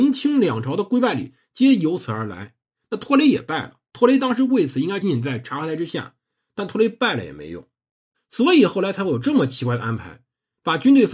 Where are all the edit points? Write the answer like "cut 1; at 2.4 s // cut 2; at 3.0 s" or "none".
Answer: cut 1; at 5.0 s // cut 2; at 8.1 s